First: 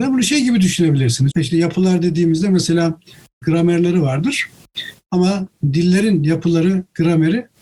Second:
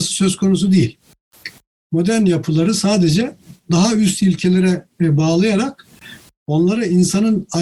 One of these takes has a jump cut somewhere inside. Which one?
first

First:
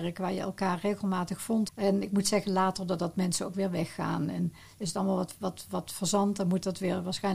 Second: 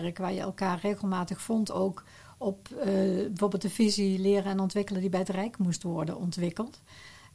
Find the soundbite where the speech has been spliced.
first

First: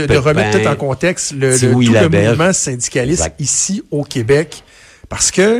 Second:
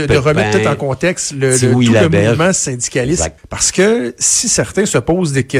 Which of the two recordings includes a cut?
second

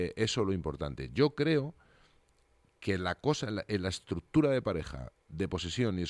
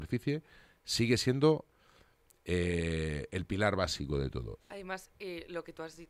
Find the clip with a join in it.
second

